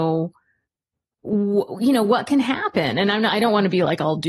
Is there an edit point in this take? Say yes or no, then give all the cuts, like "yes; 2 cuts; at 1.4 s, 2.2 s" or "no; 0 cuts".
no; 0 cuts